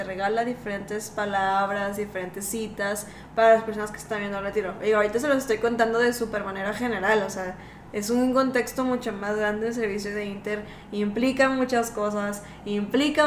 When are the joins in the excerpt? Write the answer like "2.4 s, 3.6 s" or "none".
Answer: none